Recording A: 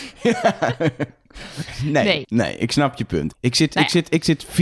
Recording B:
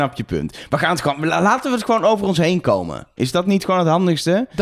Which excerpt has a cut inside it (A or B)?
A